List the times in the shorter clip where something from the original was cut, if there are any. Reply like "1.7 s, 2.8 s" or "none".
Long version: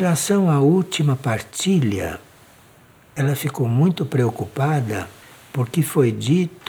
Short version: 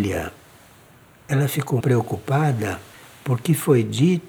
1.8 s